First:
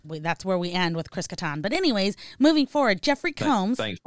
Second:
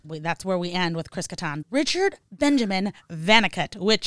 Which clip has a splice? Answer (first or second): second